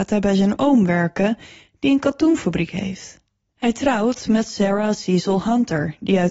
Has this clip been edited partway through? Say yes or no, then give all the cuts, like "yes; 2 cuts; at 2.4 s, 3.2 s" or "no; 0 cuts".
yes; 1 cut; at 3.5 s